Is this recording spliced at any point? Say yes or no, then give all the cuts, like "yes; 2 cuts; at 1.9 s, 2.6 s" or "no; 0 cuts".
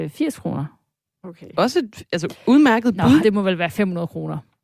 yes; 2 cuts; at 1.0 s, 3.2 s